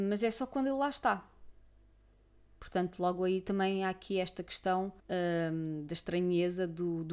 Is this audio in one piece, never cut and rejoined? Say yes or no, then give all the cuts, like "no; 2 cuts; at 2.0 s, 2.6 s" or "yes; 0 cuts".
no; 1 cut; at 5.0 s